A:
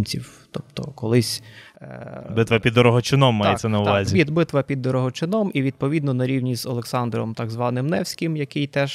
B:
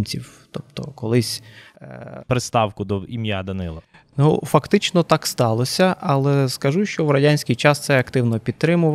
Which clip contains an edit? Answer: B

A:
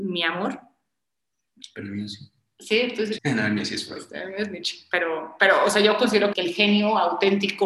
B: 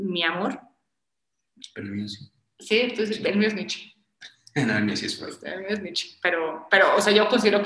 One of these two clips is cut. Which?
A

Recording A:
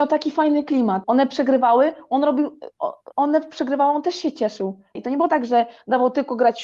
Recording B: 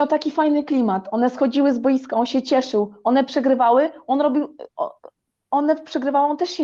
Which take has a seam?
A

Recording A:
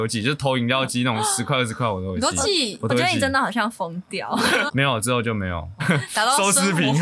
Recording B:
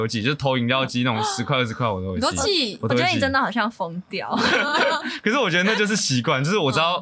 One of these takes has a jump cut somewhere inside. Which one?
A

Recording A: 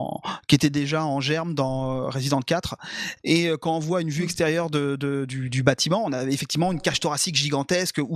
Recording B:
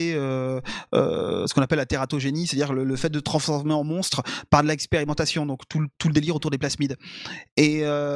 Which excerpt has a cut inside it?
A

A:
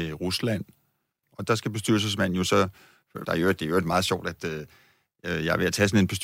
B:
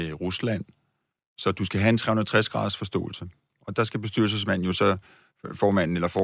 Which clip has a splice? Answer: A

